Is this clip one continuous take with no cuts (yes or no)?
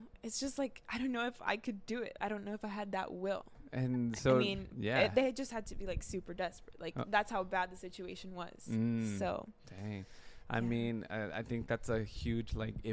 yes